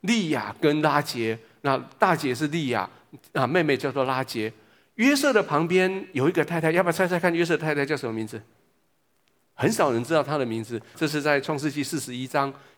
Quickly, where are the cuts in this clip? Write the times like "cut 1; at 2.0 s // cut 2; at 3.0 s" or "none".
cut 1; at 10.9 s